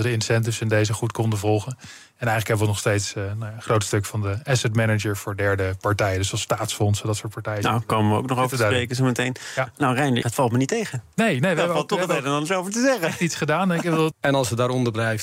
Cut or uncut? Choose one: cut